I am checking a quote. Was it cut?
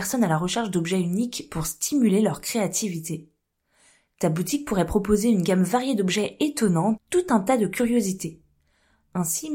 yes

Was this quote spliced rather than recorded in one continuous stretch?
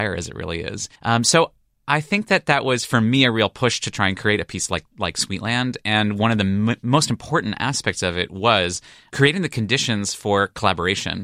yes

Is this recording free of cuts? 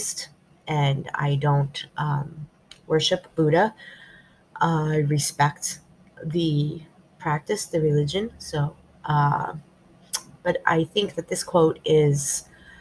yes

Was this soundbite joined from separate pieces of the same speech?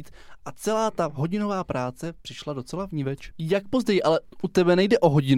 yes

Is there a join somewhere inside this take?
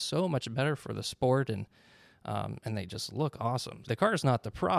yes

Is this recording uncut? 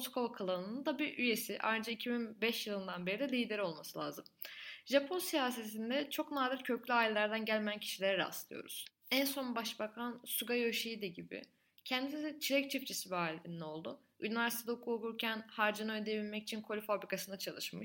yes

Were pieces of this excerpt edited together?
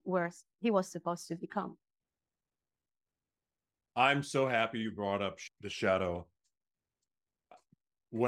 no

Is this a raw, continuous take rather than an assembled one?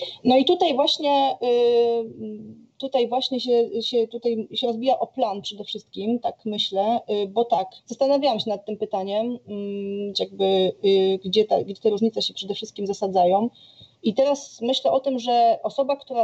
no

